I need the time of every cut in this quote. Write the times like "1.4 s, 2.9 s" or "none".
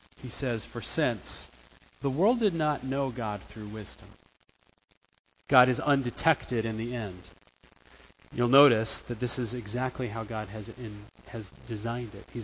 1.9 s, 5.4 s